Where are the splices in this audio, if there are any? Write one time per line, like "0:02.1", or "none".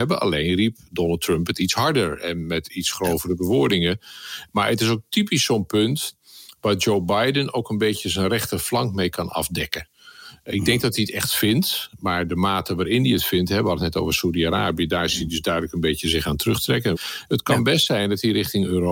0:16.9